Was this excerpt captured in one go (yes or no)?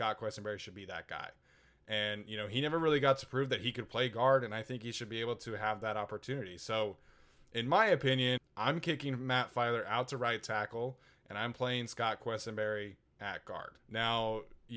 no